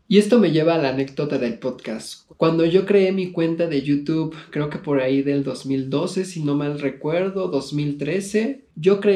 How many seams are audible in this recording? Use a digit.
0